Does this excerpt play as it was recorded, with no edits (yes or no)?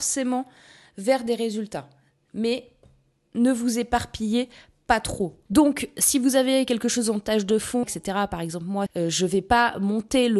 no